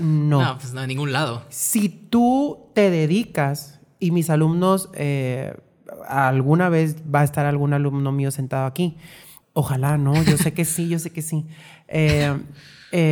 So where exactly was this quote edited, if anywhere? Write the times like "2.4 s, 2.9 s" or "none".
9.4 s